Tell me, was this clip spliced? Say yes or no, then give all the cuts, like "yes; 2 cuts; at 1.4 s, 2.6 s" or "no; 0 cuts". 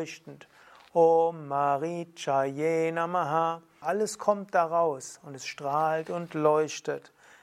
yes; 1 cut; at 3.8 s